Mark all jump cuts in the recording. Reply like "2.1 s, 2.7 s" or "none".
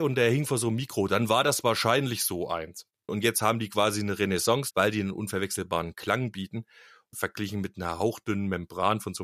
3.1 s, 4.7 s, 7.1 s